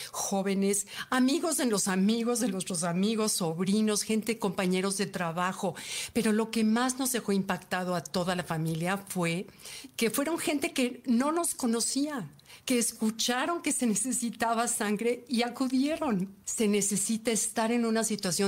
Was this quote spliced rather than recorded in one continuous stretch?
yes; 1 cut; at 16.4 s

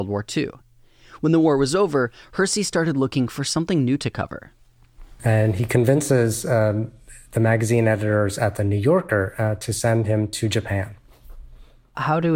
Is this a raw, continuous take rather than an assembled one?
yes; 0 cuts

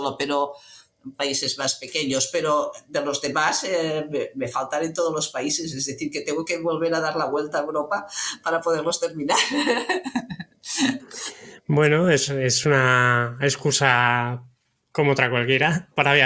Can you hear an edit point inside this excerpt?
no; 0 cuts

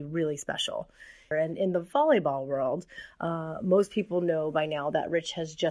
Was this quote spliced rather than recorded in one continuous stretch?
yes; 1 cut; at 1.3 s

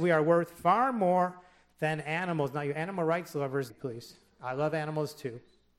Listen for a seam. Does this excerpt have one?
yes; 1 cut; at 3.7 s

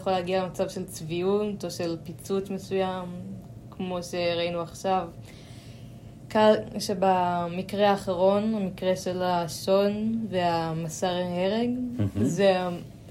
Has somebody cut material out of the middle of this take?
yes; 1 cut; at 6.7 s

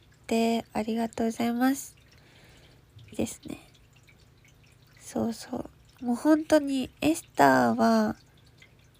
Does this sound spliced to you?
yes; 1 cut; at 3.1 s

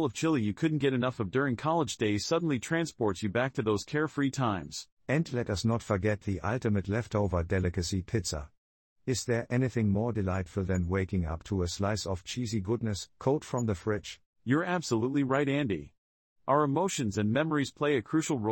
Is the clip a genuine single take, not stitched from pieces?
no; 1 cut; at 14.3 s

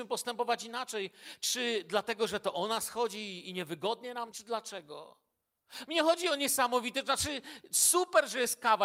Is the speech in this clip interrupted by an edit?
yes; 2 cuts; at 4.3 s, 5.9 s

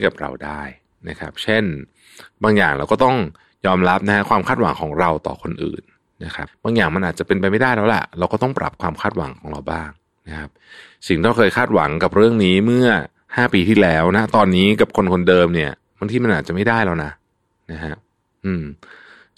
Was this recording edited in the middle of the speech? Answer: yes; 1 cut; at 6.5 s

